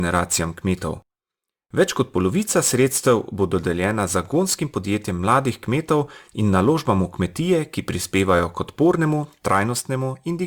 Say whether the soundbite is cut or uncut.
uncut